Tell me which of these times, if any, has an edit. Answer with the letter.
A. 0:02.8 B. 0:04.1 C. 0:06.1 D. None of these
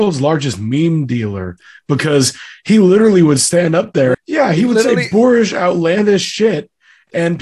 B